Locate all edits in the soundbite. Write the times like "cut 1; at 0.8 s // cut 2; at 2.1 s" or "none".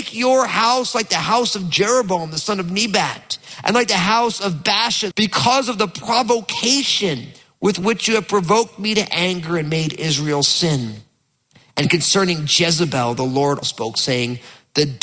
cut 1; at 5.1 s // cut 2; at 13.6 s